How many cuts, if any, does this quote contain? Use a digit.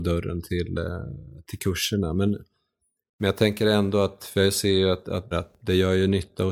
1